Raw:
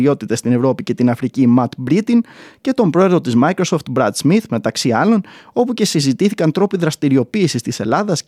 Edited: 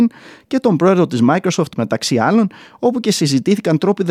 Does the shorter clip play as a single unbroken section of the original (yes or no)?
no